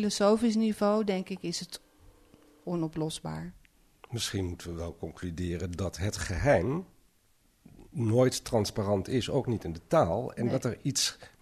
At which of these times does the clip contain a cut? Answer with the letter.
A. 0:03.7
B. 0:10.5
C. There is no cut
C